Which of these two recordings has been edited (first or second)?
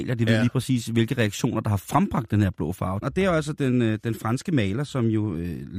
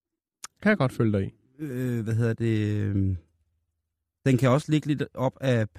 first